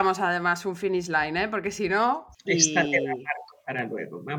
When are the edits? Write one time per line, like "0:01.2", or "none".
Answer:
0:02.3